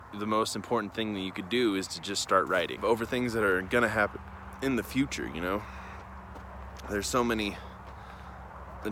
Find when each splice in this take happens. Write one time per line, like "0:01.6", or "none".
0:02.8